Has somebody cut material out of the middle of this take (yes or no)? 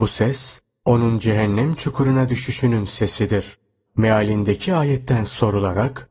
yes